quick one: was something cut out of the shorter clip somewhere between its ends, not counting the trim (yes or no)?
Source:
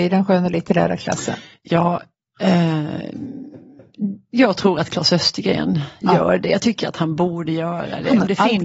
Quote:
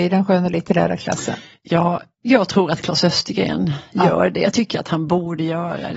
yes